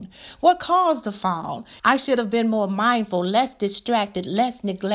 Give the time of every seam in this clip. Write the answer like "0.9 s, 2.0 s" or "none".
1.8 s